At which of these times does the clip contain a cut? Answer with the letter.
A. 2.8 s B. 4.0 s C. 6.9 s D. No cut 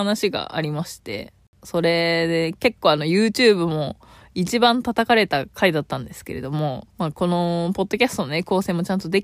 C